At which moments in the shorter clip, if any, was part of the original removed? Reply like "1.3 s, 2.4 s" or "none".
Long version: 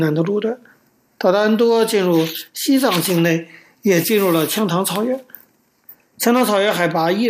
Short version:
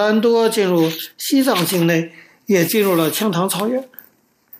none